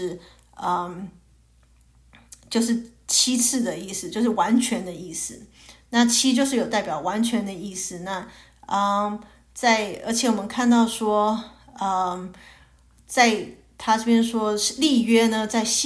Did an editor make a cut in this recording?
no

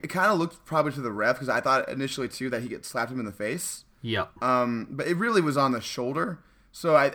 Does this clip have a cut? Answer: no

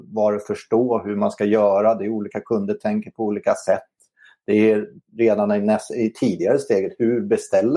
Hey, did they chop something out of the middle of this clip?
no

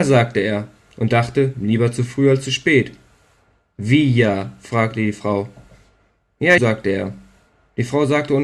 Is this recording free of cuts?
no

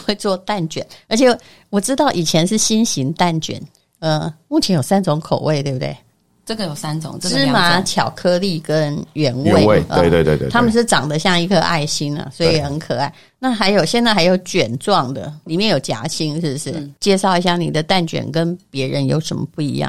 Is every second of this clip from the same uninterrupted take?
yes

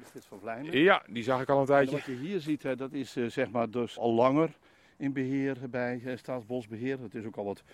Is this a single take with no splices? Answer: no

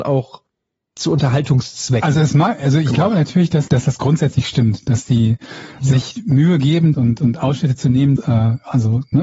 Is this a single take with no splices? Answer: no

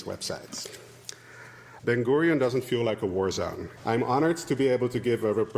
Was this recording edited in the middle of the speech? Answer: yes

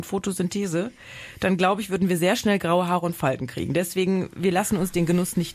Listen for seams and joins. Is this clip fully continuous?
yes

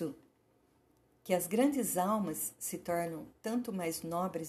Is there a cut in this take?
no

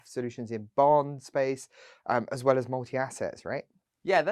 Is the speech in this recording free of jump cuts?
yes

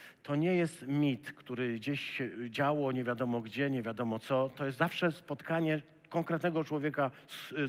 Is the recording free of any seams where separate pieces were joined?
yes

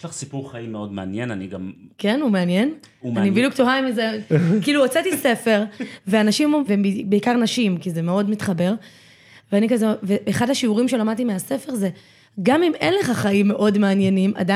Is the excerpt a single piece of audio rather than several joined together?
no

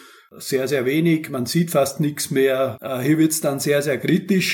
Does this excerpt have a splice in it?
no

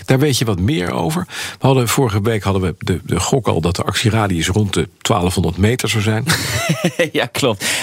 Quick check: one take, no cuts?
yes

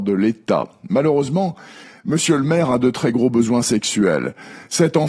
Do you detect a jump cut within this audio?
no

